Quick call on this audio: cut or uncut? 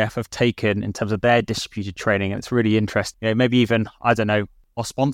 uncut